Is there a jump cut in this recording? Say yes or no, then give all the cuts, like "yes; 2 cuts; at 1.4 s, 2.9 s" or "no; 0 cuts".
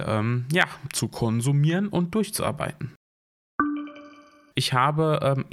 yes; 1 cut; at 4.5 s